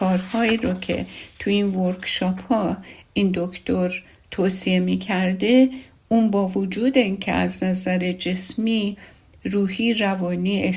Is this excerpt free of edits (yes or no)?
yes